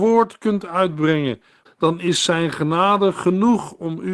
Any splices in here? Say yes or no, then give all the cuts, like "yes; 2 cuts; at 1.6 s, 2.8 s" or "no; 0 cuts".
yes; 1 cut; at 1.6 s